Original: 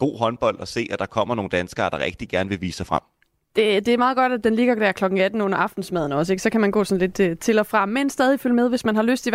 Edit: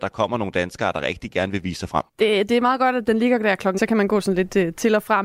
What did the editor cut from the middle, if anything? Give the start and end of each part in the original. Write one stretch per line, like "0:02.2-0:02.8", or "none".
0:03.1-0:03.4
0:05.1-0:06.4